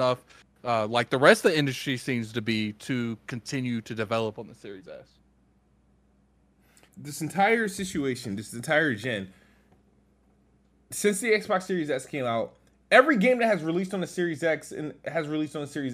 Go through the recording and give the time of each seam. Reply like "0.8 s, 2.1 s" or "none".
6.9 s